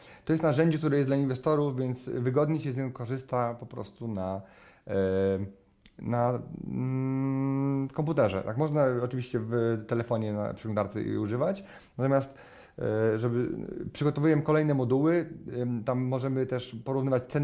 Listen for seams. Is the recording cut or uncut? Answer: uncut